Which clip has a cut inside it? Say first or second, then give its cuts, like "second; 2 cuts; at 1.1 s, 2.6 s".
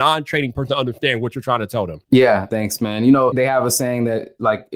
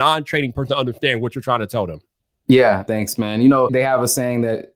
first; 1 cut; at 2.0 s